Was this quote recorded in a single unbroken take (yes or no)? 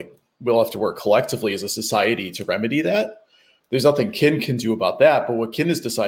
yes